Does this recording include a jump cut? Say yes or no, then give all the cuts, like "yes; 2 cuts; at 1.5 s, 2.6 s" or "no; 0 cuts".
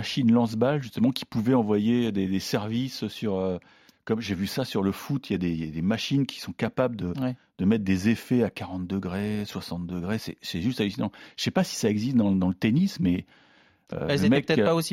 no; 0 cuts